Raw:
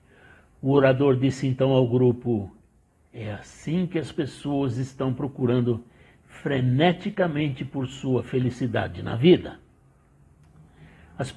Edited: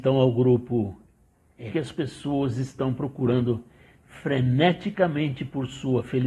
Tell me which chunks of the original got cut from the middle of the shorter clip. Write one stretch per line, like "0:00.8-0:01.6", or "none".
0:03.2-0:03.9